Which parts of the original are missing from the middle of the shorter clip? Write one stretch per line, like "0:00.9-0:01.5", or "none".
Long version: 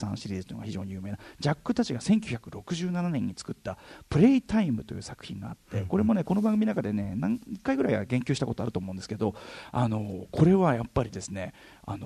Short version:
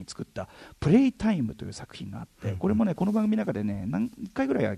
none